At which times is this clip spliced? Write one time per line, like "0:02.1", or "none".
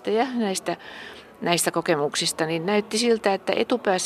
none